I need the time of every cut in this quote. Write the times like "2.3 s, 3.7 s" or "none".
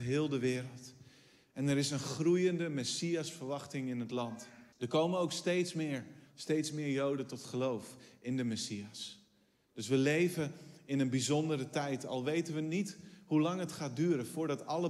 4.7 s, 6.3 s